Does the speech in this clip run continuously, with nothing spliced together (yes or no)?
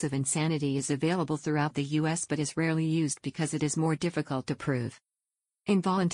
yes